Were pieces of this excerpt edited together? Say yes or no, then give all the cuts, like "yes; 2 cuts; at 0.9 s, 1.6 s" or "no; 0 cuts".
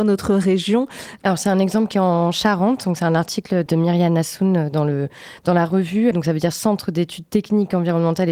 yes; 3 cuts; at 1.2 s, 3.7 s, 6.1 s